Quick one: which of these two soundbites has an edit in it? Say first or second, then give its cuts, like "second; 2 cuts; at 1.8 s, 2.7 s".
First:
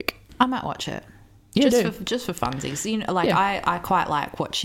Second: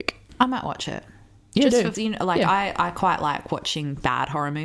second; 1 cut; at 1.9 s